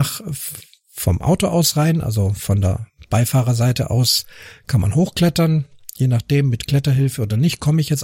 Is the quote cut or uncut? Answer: uncut